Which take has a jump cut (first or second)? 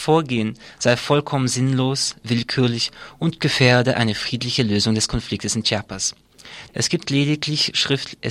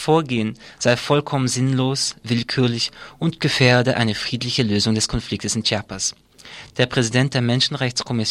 first